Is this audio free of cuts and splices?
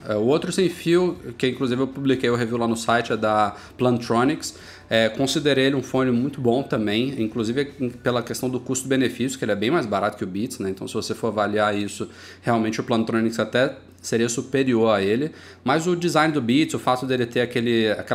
yes; 0 cuts

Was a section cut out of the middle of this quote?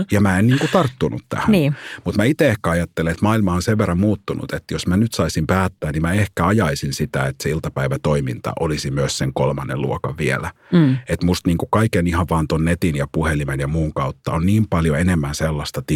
no; 0 cuts

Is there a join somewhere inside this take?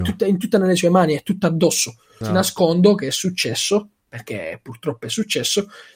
yes; 1 cut; at 2.2 s

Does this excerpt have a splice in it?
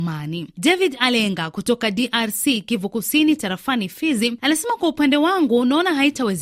no; 0 cuts

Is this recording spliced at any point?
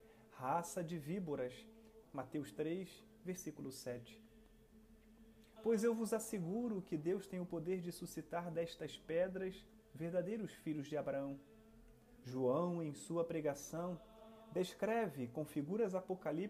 yes; 3 cuts; at 2.0 s, 5.6 s, 12.2 s

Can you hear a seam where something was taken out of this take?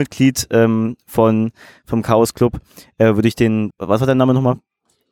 yes; 1 cut; at 3.7 s

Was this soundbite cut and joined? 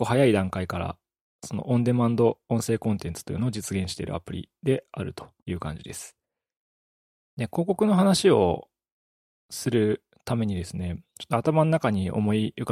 no; 0 cuts

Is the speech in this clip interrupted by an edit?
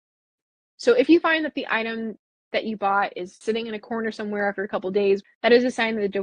yes; 2 cuts; at 3.4 s, 5.2 s

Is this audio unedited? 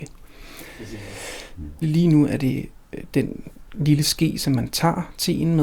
no; 1 cut; at 1.8 s

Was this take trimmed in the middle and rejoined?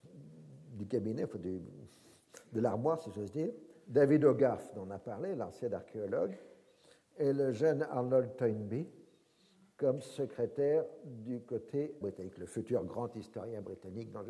yes; 1 cut; at 12.0 s

